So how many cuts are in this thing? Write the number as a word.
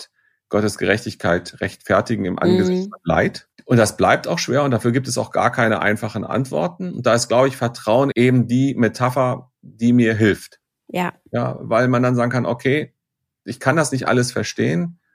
two